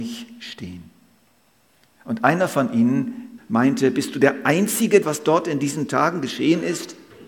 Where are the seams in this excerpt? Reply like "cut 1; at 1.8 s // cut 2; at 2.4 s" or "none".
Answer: cut 1; at 3.4 s // cut 2; at 5.0 s